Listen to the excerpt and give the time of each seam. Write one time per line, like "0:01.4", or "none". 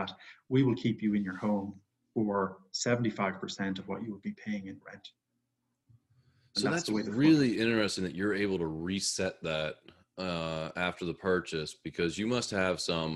none